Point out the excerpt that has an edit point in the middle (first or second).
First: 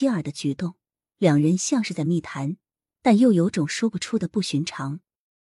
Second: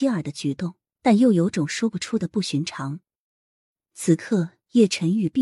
second